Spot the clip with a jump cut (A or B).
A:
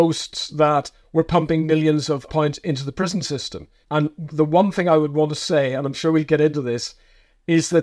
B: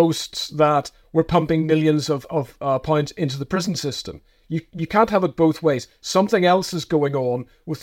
A